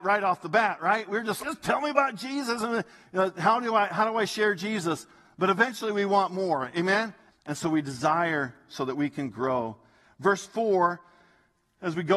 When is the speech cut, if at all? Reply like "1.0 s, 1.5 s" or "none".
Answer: 1.4 s, 7.3 s